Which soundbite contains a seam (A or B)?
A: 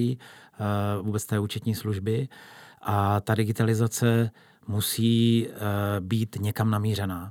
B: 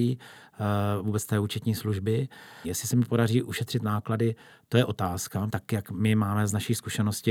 B